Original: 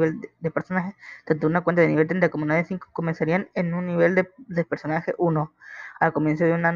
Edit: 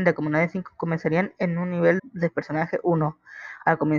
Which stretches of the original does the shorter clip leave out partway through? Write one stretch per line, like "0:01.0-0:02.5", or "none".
0:04.1-0:04.3

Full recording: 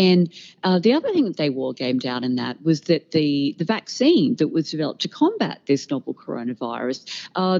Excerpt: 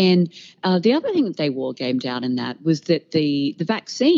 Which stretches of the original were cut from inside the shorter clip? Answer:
none

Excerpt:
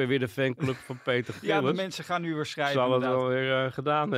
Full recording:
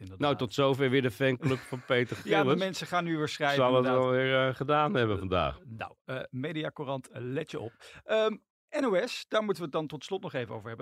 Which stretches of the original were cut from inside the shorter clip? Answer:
none

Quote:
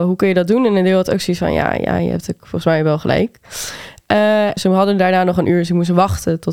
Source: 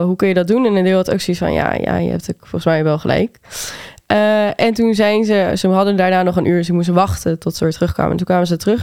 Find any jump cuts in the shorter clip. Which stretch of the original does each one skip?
0:04.6-0:05.6

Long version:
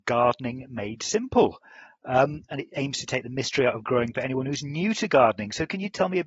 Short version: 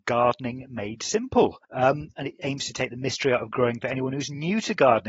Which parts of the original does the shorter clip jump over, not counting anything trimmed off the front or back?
0:01.6-0:02.0

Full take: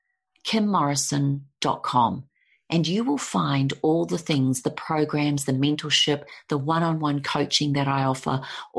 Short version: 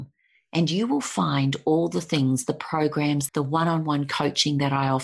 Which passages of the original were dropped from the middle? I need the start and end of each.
0:05.5-0:06.4

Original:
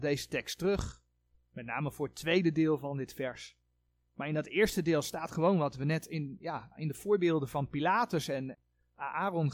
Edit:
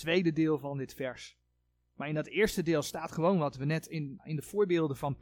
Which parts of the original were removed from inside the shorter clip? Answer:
0:06.4-0:06.7

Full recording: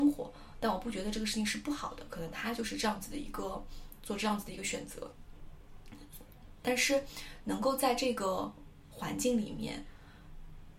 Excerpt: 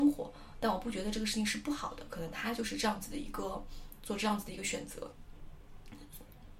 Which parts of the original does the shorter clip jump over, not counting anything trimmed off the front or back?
none

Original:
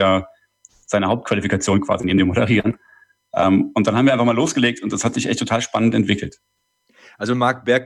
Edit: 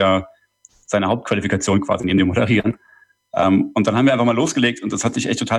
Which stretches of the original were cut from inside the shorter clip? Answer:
none

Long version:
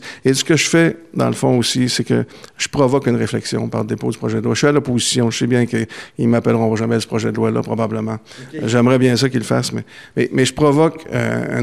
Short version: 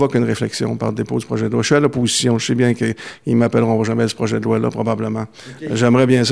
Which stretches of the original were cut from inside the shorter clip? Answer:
none

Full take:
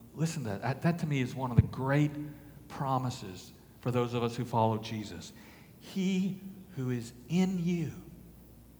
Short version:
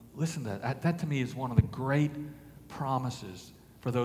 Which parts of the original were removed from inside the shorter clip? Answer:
none

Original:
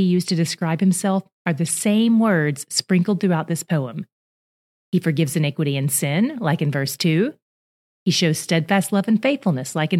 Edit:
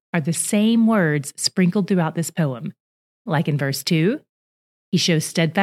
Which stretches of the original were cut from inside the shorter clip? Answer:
0:04.6-0:06.4

